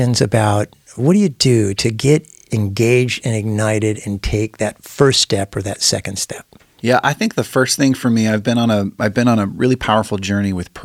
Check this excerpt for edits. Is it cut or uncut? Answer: uncut